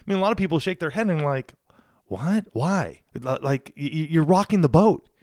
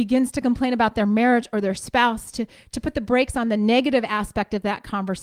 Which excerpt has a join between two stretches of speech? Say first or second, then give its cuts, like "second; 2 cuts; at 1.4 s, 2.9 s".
first; 1 cut; at 3.1 s